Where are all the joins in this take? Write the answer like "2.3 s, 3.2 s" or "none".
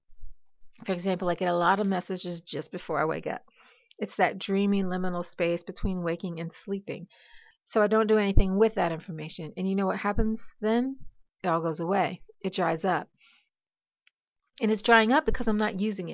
7.5 s